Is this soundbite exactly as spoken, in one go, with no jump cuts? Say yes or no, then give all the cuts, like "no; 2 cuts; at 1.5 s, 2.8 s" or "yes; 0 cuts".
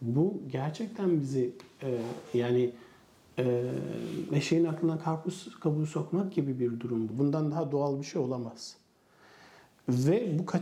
no; 1 cut; at 7.1 s